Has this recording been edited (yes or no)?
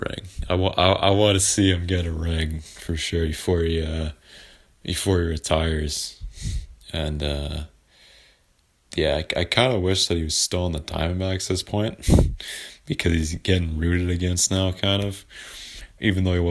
no